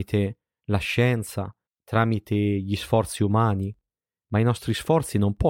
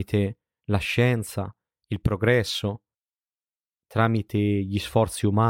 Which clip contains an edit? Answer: first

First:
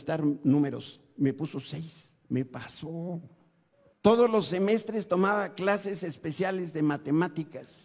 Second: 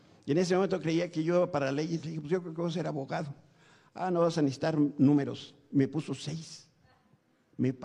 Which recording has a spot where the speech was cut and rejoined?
first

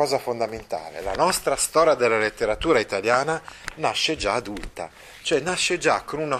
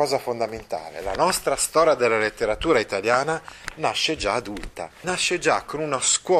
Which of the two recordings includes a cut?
second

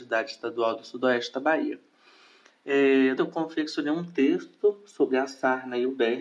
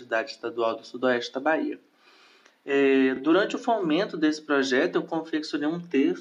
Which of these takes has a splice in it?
first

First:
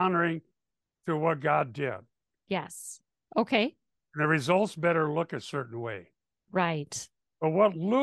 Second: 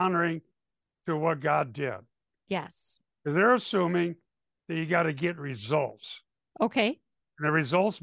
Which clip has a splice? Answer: first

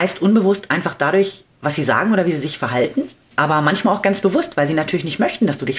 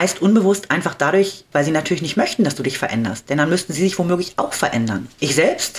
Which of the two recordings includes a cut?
second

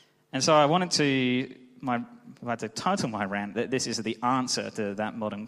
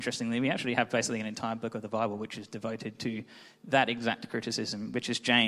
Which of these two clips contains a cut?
first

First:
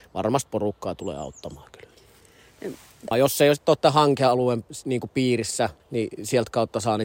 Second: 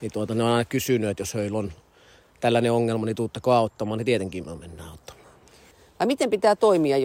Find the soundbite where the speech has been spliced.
first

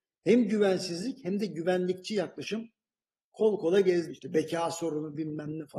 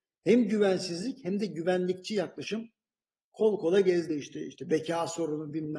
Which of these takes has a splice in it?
first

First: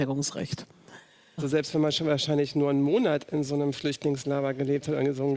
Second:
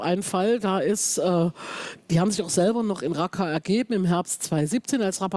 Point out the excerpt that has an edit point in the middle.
first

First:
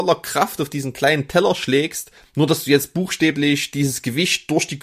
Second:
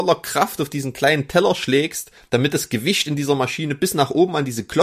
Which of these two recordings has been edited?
first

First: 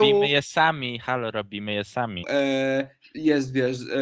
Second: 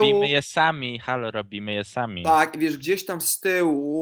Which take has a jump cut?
first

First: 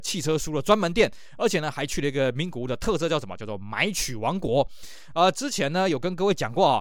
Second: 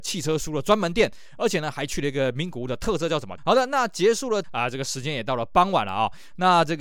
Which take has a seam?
second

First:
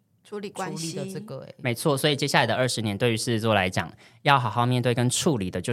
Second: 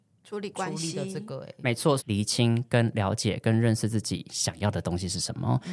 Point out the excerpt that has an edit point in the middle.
second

